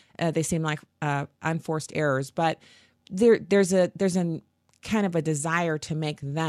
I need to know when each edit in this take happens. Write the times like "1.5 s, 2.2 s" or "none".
none

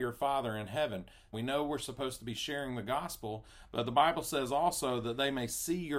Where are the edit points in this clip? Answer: 1.3 s

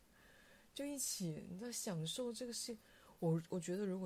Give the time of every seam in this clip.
none

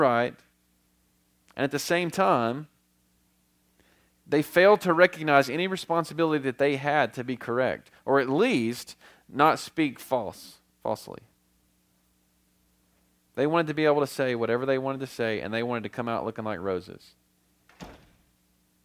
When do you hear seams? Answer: none

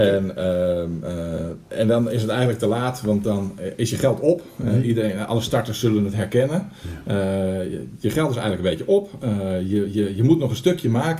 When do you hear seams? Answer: none

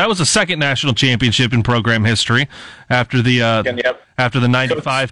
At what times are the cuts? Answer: 3.6 s

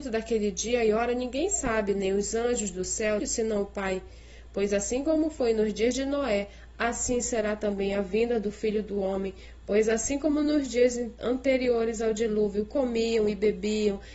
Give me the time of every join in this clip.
3.2 s

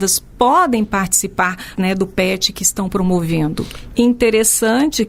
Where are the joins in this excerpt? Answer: 1.8 s, 3.9 s

